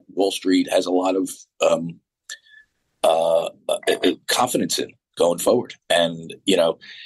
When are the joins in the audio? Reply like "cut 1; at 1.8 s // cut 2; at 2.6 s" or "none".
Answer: cut 1; at 5.8 s